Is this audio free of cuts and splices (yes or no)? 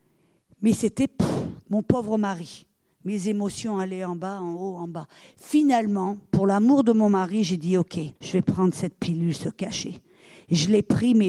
no